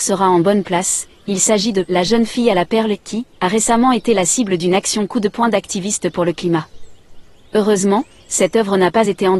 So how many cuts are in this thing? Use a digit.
1